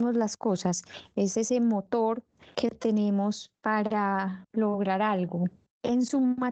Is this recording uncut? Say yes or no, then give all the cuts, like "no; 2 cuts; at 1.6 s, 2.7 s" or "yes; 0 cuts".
yes; 0 cuts